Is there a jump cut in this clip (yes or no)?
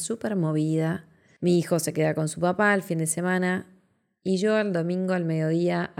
no